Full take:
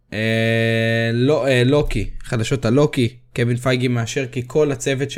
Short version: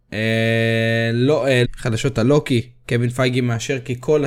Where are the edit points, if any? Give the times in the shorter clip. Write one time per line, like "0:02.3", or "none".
0:01.6